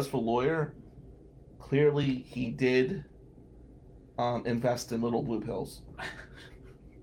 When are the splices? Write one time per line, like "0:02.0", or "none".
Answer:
none